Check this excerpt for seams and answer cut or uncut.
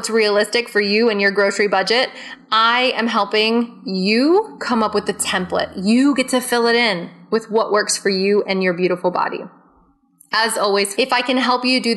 cut